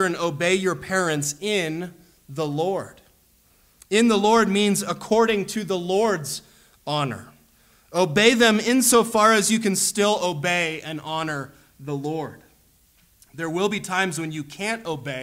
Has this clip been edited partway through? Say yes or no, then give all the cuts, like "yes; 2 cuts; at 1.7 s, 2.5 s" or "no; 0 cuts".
no; 0 cuts